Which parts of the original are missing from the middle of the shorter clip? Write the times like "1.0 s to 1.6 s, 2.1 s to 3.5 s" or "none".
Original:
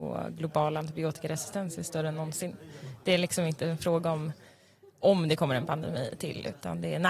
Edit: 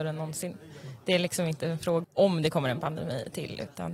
4.0 s to 4.9 s